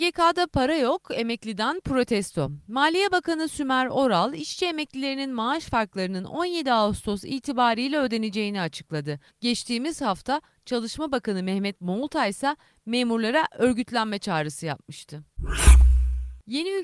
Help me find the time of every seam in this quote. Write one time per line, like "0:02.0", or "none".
0:09.3